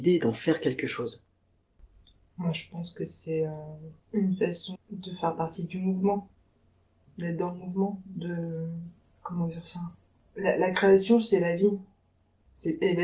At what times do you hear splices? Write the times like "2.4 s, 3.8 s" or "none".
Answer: 4.8 s

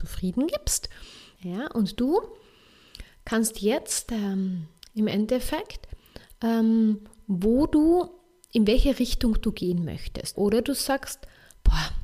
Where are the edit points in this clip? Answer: 1.4 s, 4.8 s, 10.4 s

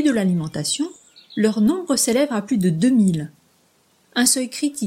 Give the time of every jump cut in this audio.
none

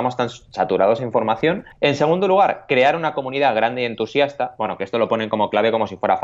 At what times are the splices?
1.7 s

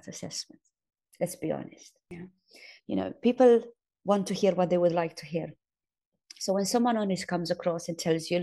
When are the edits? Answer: 2.8 s

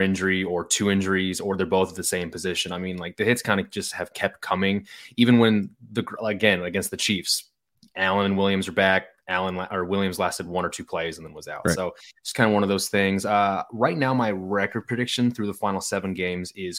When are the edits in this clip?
none

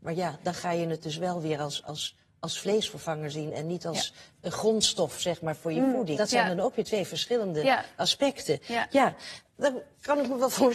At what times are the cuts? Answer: 6.2 s

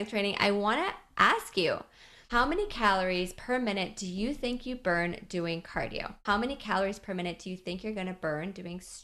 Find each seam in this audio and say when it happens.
6.2 s

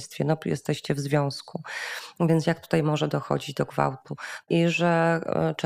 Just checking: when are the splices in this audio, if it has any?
4.4 s

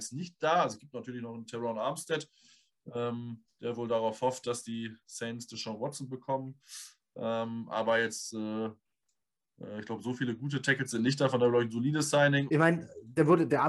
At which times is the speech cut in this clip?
12.5 s

